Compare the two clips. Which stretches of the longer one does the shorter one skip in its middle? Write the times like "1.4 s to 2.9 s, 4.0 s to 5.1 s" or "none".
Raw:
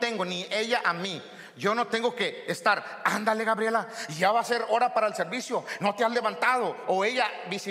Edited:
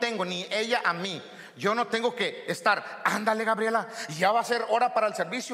none